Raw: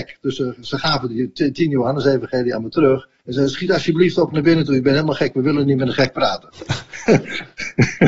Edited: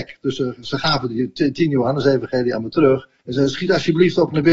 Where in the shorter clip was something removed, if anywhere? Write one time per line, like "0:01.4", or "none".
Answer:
none